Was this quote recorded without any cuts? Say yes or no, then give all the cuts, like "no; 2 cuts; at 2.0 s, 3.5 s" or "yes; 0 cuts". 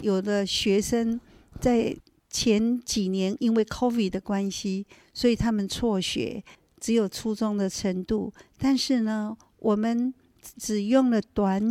yes; 0 cuts